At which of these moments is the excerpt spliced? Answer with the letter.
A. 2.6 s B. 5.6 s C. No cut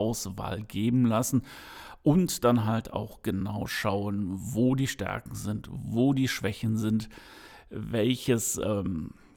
C